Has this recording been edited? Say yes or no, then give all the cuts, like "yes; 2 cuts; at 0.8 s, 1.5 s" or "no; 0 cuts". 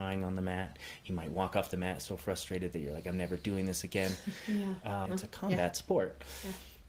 yes; 1 cut; at 5.1 s